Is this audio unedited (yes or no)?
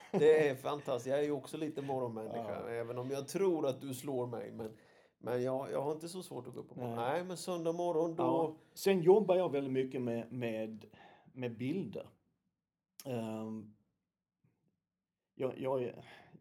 yes